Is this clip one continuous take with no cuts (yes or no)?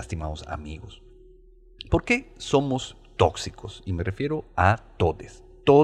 yes